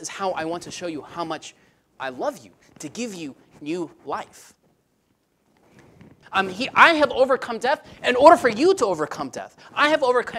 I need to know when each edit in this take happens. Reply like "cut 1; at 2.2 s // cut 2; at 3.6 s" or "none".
cut 1; at 6.2 s

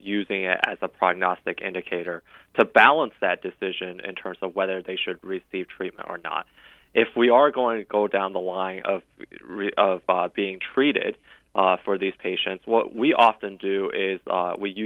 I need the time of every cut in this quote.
none

